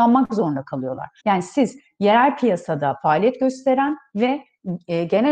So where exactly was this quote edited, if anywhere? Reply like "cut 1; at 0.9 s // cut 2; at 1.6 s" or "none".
cut 1; at 1.2 s